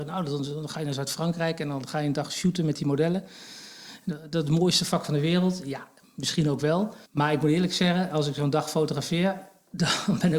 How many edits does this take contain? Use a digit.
1